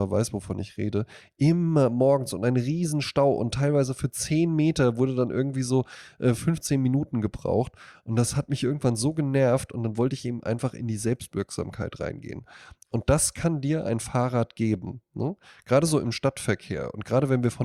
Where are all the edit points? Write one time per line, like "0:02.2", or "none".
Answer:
none